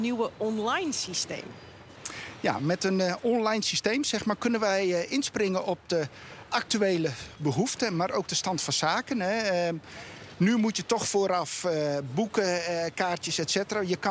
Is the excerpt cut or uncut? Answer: uncut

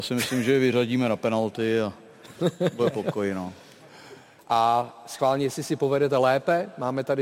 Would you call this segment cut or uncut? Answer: cut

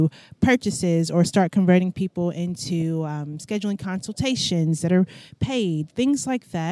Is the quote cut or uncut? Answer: uncut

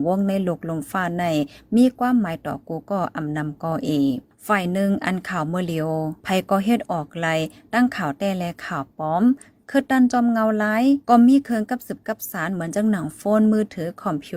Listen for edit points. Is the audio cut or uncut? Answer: uncut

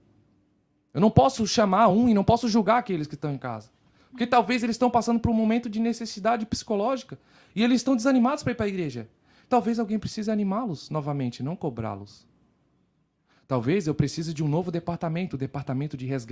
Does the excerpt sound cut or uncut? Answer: uncut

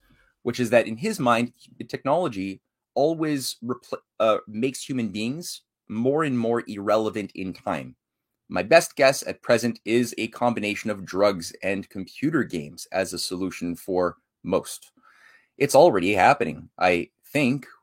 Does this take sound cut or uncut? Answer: cut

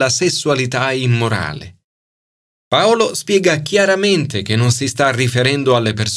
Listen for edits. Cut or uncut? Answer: uncut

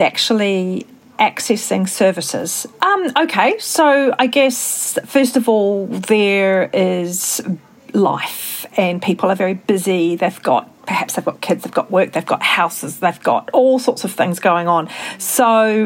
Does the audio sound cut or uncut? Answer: cut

